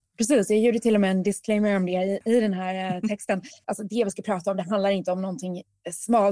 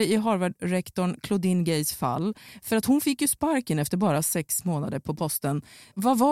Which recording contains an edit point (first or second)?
first